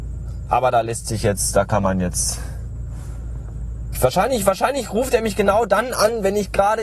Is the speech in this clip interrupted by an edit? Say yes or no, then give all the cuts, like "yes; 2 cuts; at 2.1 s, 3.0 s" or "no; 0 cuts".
yes; 1 cut; at 3.9 s